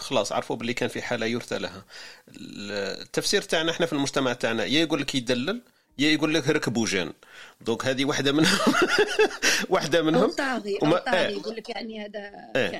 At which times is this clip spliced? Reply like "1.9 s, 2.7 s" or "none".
none

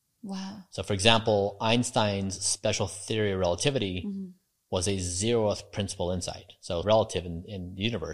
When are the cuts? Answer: 6.8 s

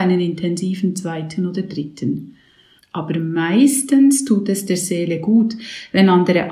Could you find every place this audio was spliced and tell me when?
2.8 s

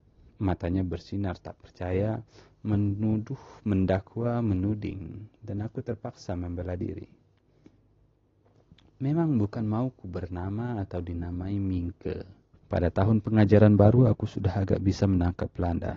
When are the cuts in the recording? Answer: 12.5 s

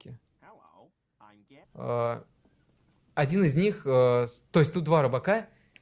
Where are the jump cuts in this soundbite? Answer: 1.6 s

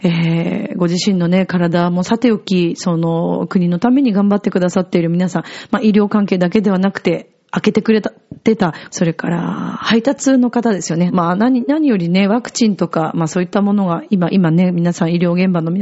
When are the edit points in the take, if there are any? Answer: 8.9 s, 11.1 s

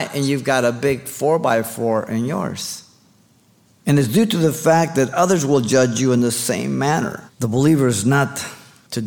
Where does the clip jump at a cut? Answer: 3.8 s, 7.3 s

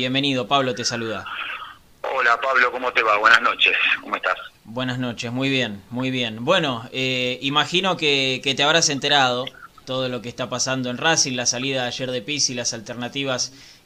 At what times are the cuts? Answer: none

